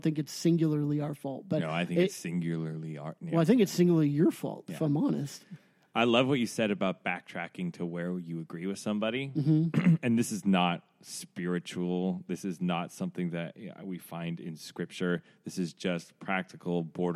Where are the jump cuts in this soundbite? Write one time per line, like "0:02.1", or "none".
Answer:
none